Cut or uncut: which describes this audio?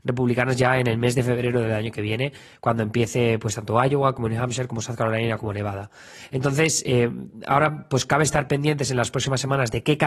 uncut